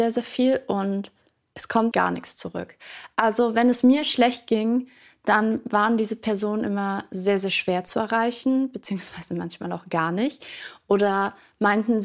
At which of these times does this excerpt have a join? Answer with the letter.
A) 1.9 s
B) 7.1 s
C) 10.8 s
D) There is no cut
A